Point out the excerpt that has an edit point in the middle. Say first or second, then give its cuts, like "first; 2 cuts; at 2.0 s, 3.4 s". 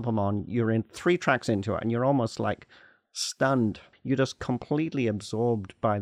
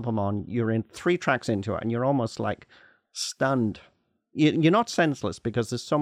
first; 1 cut; at 3.9 s